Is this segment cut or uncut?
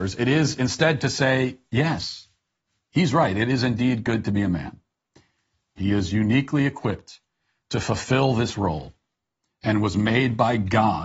cut